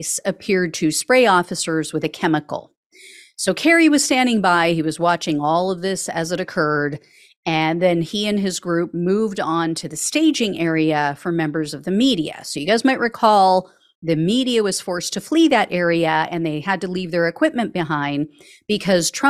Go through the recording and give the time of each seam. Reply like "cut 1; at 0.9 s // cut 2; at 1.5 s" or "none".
none